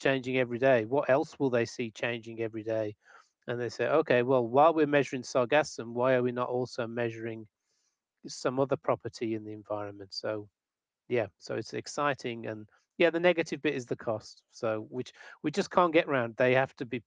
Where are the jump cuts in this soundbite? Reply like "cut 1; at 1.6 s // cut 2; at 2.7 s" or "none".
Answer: none